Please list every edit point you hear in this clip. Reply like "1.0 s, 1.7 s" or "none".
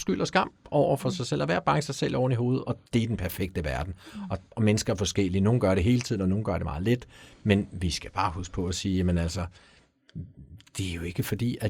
2.9 s